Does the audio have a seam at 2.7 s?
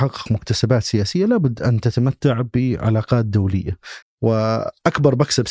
no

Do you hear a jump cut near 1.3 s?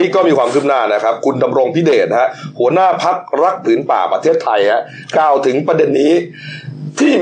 no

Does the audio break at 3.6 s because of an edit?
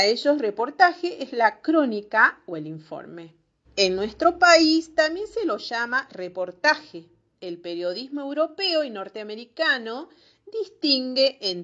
yes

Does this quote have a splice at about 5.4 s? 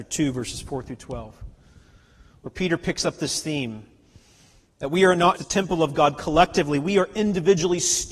yes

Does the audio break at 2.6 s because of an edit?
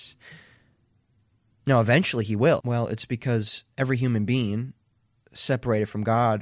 yes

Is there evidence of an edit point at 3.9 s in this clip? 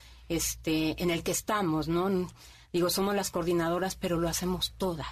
no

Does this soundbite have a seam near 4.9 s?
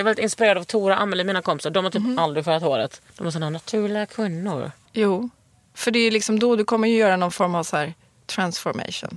yes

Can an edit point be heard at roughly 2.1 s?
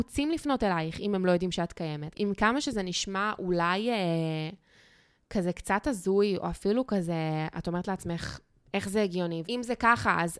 yes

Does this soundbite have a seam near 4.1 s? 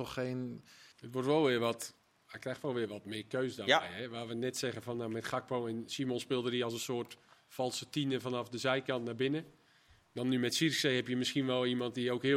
no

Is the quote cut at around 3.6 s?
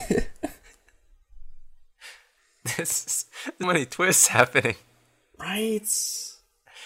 yes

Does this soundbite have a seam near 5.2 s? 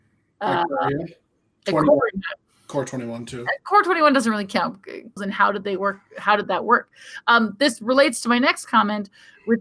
yes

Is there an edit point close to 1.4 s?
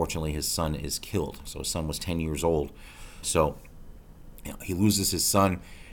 no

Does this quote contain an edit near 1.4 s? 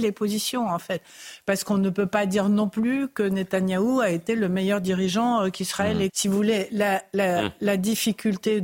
no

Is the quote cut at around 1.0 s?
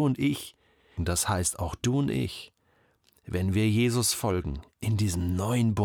yes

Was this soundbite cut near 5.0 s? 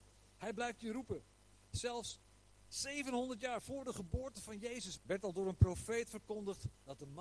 yes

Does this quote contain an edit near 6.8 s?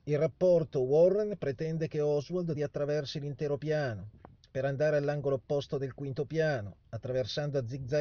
no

